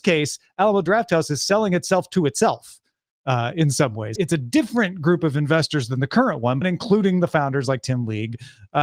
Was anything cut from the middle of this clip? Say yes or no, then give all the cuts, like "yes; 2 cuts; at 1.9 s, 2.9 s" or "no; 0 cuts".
yes; 2 cuts; at 4.2 s, 6.6 s